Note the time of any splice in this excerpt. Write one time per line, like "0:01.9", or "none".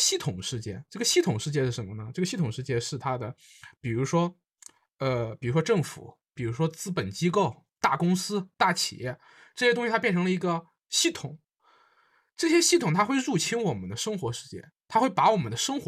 none